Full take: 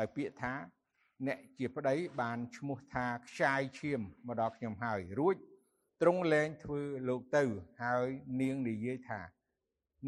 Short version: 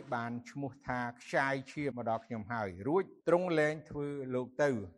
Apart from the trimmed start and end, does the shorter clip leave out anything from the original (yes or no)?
yes